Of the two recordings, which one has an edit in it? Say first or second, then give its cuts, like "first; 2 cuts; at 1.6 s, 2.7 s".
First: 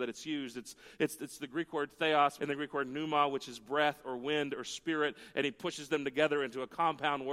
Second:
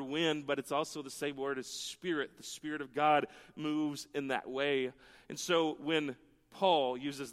first; 1 cut; at 2.4 s